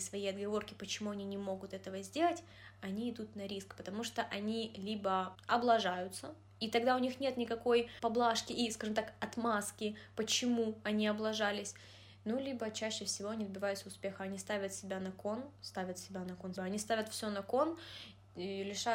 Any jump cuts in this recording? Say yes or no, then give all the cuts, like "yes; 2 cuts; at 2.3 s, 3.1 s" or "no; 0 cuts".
yes; 2 cuts; at 15.5 s, 16.6 s